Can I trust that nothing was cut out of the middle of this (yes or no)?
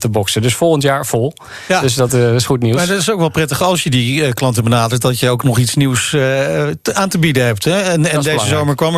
yes